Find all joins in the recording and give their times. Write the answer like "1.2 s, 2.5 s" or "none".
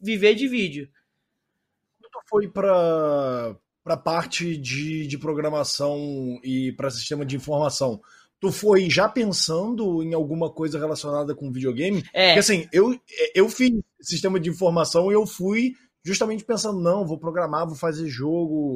none